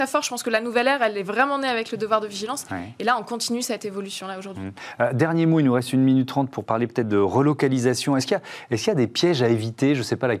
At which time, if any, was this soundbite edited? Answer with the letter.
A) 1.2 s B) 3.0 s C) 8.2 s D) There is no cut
D